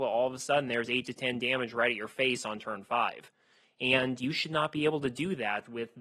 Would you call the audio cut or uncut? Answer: uncut